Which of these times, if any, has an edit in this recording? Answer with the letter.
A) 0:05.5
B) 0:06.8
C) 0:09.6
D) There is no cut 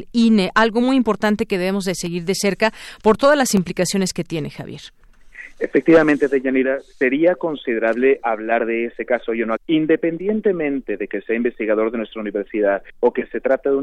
C